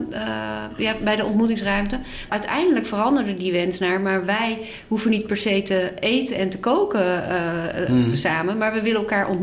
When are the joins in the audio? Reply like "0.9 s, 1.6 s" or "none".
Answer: 2.3 s